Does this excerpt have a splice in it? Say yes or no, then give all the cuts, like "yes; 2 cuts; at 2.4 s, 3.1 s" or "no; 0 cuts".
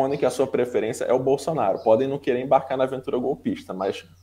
no; 0 cuts